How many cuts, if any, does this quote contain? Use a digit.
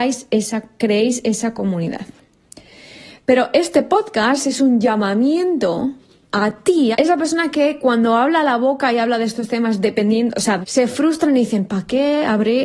2